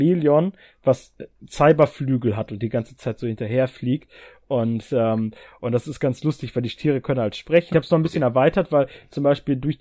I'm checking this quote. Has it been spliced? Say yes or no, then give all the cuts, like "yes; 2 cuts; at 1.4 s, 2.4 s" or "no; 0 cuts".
yes; 1 cut; at 7.7 s